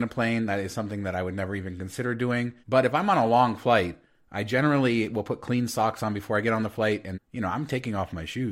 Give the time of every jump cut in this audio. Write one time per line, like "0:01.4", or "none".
0:02.6
0:07.1